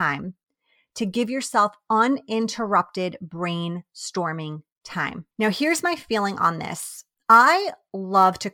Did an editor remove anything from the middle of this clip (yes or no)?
yes